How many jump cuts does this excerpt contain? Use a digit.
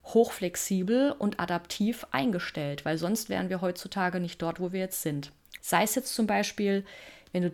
1